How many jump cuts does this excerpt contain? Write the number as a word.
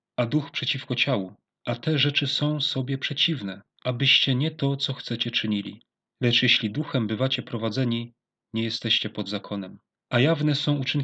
zero